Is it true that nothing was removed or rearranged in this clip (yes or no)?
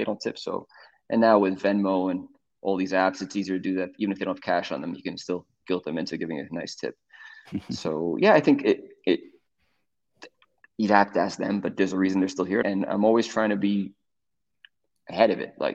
no